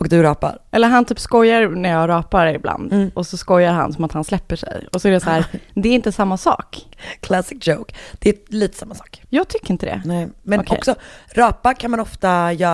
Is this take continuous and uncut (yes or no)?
yes